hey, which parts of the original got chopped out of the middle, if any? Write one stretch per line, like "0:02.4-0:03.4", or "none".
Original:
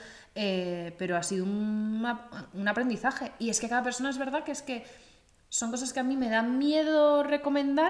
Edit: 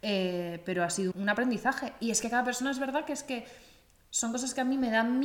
0:01.4-0:02.5